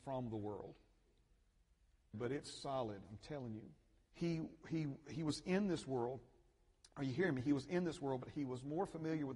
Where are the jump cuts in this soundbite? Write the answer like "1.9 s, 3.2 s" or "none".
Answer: 2.1 s, 4.1 s